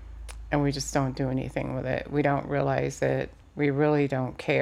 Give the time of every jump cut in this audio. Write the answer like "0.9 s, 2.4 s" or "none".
3.4 s